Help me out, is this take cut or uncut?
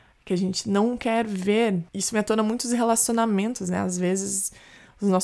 uncut